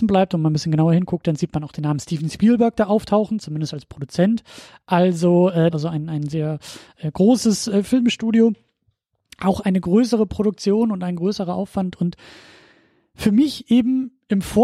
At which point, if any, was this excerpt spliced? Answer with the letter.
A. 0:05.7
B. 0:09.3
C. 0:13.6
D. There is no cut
A